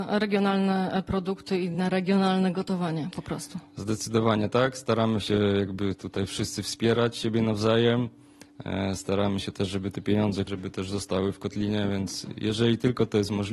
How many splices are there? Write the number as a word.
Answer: one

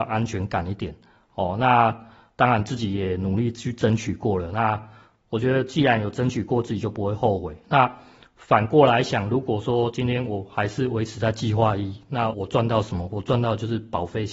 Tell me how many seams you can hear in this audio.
one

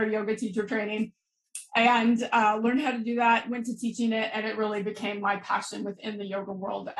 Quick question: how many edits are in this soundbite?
zero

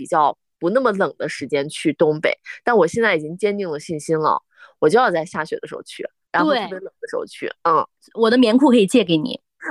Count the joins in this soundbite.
zero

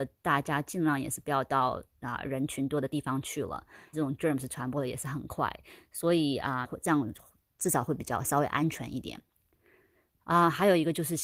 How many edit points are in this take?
two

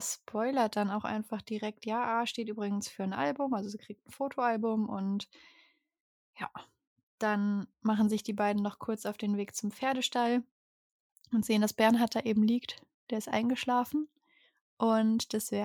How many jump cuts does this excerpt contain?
one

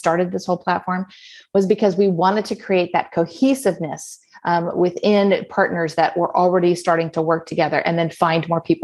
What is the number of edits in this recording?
zero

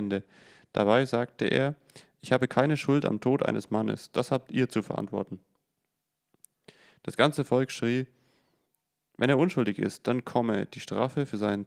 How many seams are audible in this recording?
zero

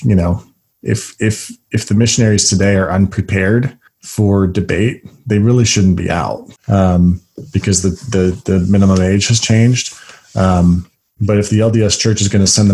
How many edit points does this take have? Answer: one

